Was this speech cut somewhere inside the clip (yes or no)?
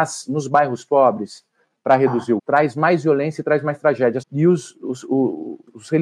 yes